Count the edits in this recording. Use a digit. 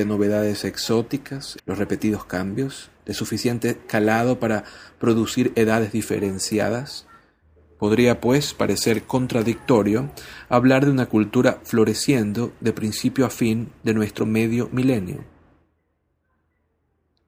1